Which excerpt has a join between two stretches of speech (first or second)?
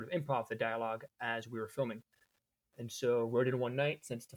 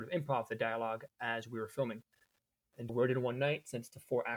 second